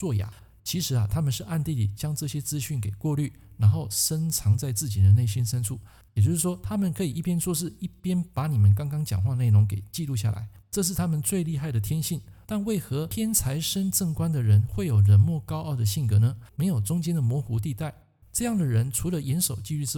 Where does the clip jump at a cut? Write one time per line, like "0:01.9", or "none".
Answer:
0:12.4
0:16.5